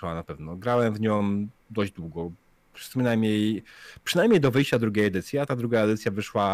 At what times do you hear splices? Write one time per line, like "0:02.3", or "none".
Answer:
none